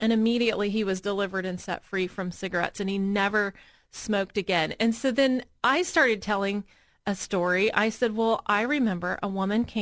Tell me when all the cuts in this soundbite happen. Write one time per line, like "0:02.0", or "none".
none